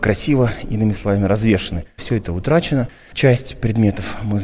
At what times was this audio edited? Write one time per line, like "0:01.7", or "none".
0:02.0